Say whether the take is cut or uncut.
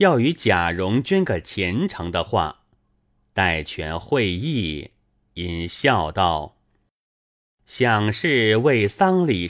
uncut